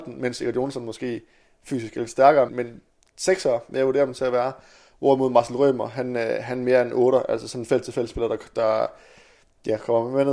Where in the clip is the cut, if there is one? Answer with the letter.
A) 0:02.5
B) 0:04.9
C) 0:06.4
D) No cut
A